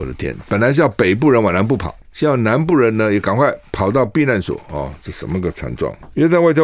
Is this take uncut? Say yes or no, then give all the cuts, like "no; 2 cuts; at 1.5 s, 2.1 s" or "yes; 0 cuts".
yes; 0 cuts